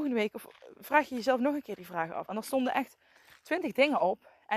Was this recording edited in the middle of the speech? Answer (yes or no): yes